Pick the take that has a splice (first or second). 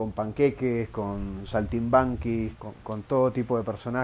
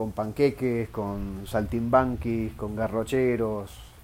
first